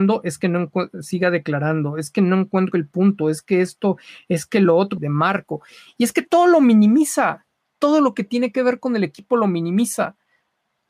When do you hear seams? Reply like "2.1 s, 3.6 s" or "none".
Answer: 5.0 s